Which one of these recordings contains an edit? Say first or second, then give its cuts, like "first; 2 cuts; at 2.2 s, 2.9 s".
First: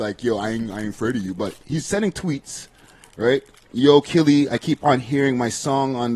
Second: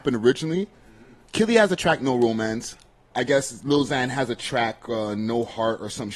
second; 1 cut; at 3.1 s